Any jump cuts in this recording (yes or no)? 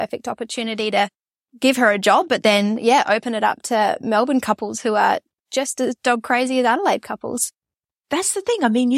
no